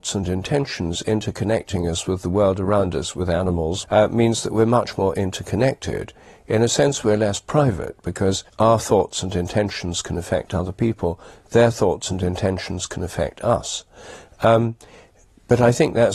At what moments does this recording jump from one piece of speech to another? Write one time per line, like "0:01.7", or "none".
0:03.8
0:08.5